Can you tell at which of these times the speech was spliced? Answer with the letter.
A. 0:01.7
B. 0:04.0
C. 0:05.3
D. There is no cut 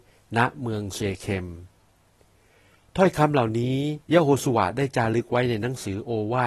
B